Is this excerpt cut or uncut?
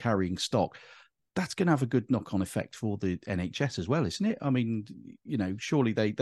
uncut